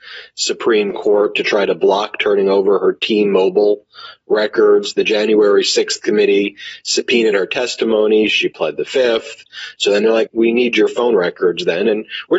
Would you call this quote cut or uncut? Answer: cut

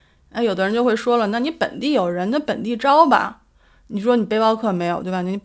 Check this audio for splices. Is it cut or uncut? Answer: uncut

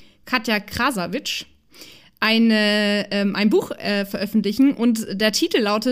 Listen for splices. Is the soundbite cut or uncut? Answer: uncut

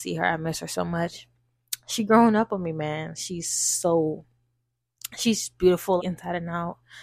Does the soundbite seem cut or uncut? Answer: cut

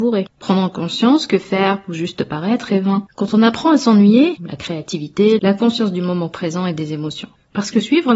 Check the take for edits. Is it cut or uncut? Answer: cut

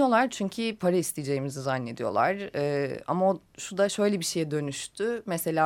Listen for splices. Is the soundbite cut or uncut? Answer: uncut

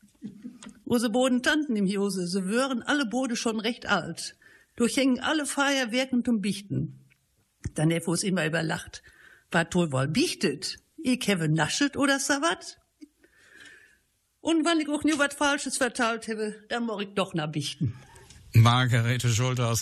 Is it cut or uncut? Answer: uncut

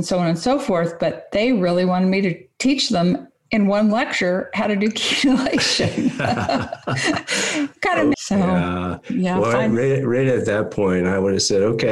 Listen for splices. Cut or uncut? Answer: cut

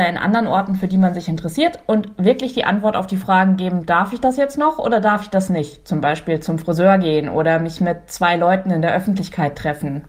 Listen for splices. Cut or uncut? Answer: uncut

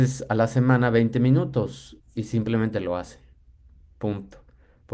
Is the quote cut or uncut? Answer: cut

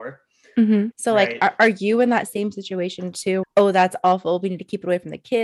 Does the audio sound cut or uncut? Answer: cut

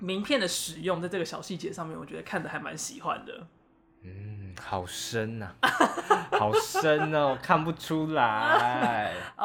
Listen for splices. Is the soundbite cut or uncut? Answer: uncut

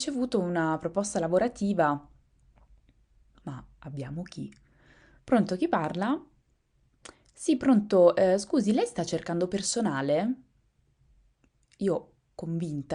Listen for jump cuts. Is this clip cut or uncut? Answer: cut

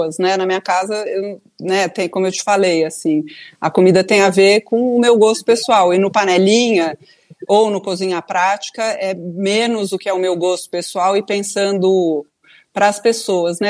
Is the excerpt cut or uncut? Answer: uncut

